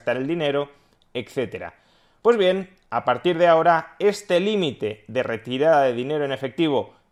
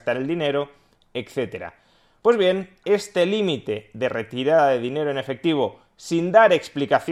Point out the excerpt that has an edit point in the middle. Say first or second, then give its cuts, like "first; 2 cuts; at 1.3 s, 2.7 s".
second; 1 cut; at 2.8 s